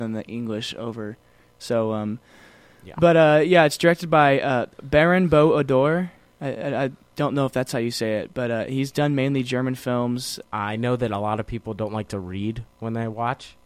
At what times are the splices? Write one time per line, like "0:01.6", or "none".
0:10.4